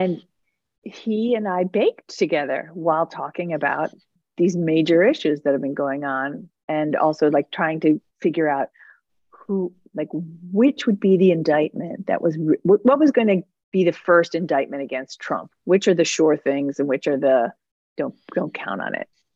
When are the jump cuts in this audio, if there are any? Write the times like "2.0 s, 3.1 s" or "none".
none